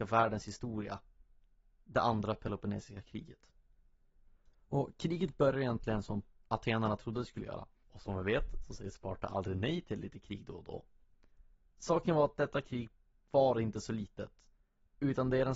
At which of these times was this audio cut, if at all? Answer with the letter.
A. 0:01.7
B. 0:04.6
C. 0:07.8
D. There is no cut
C